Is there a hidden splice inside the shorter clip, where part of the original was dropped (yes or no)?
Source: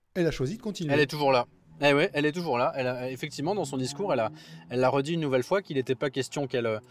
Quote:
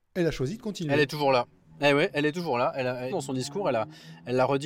yes